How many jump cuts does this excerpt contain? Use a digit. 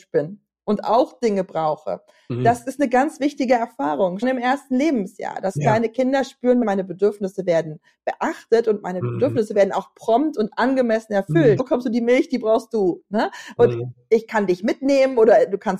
3